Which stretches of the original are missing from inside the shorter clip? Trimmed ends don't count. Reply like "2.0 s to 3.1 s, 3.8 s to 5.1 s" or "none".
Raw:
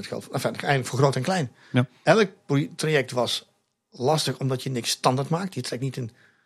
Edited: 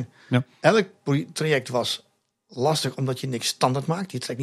none